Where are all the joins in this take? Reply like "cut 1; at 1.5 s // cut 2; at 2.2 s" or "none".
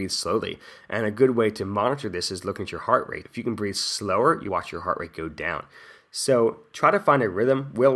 cut 1; at 3.2 s // cut 2; at 4.5 s